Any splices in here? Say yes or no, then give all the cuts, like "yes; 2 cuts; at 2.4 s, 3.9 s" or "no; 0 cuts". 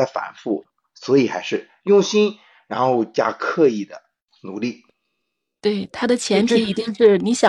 no; 0 cuts